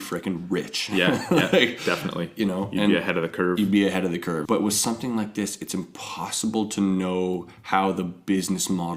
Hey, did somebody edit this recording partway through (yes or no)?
yes